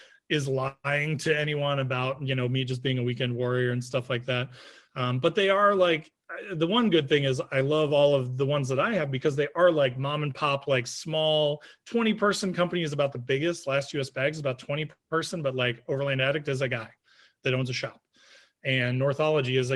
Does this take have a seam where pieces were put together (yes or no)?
no